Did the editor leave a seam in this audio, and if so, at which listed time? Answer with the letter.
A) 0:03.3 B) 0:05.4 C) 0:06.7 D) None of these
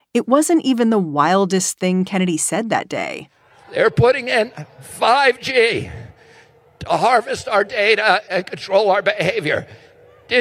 D